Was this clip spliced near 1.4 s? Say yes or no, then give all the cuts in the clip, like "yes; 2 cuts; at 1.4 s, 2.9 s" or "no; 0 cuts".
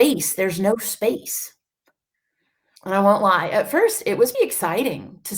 no; 2 cuts; at 2.8 s, 4.3 s